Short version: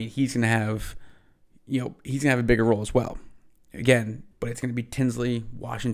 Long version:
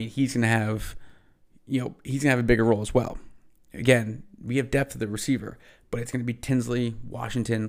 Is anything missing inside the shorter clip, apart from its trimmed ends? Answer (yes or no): yes